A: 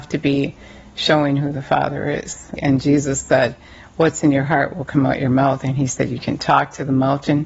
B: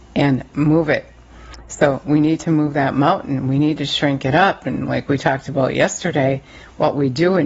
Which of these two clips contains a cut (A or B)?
A